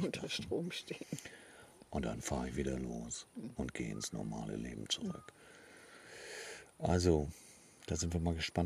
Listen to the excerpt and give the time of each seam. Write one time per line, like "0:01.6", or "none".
none